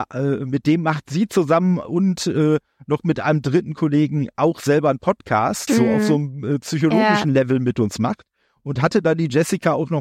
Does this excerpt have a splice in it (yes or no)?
yes